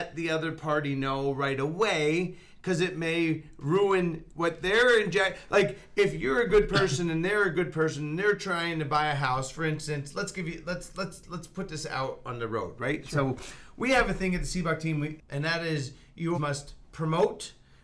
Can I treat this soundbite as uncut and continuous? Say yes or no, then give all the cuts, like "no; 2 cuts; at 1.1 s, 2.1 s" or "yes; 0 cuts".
no; 2 cuts; at 15.2 s, 16.3 s